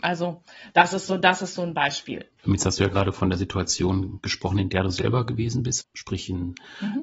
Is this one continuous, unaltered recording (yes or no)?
no